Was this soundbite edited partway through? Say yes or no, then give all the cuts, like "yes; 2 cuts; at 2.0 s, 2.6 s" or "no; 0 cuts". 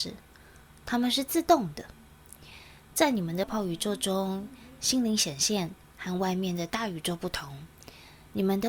yes; 1 cut; at 3.4 s